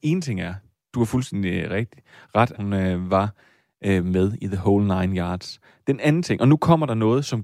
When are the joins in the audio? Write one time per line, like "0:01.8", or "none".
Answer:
0:02.5